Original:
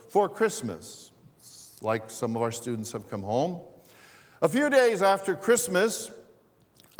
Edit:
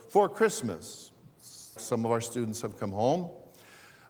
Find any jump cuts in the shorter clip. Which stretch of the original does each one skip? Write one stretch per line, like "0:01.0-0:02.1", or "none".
0:01.8-0:02.1

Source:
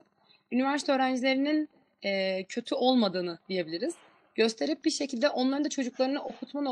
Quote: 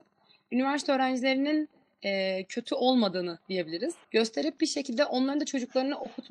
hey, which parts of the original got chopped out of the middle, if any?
0:04.0-0:04.3

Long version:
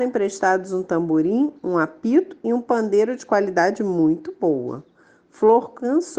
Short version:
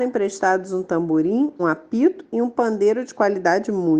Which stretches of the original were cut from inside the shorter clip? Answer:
0:01.6-0:01.7

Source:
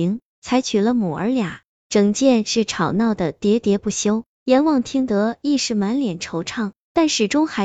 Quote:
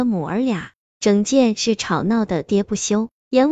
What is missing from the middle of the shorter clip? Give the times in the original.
0:03.3-0:03.6

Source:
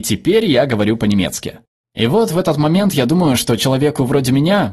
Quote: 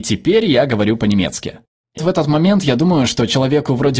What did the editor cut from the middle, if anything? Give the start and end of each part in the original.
0:02.0-0:02.3

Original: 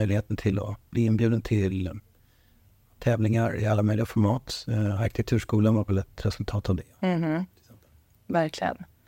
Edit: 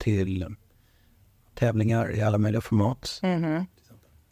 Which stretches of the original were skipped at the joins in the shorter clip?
0:04.6-0:07.0

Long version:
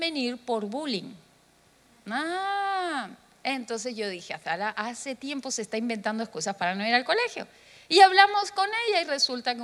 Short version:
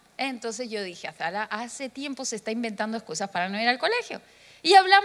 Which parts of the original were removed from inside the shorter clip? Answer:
none

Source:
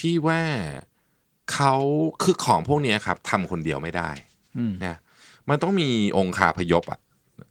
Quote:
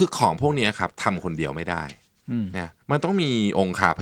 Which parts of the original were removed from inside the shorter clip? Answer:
0:05.1-0:05.4

